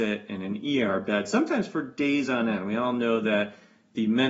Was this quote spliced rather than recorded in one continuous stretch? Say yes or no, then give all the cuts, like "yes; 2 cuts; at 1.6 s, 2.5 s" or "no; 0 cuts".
no; 0 cuts